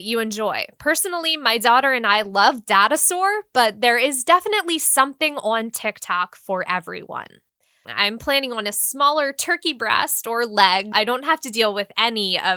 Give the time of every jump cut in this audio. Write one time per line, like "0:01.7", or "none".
0:07.8
0:10.9